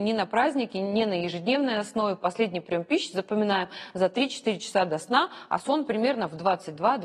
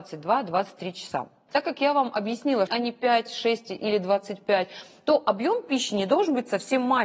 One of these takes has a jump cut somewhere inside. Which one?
second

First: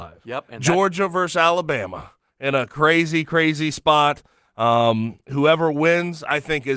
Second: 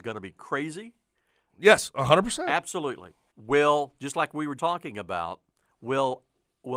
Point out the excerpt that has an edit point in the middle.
second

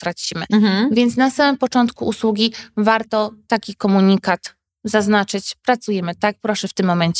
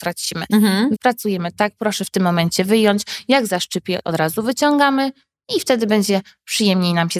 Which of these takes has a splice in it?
second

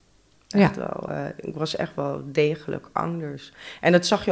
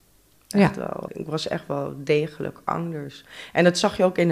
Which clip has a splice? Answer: second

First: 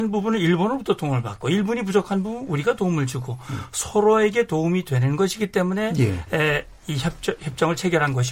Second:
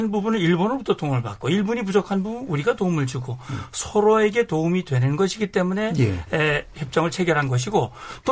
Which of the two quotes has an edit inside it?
second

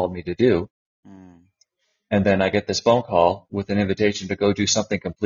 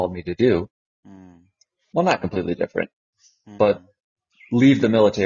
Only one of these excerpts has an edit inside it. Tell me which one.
second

